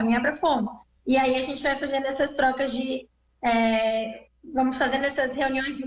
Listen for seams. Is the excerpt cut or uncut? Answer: uncut